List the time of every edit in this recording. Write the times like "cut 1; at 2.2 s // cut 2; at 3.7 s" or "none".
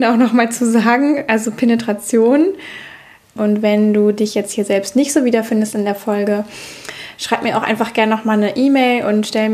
cut 1; at 3.4 s